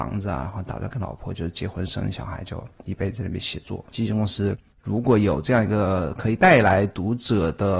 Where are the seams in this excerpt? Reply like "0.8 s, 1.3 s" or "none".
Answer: 3.9 s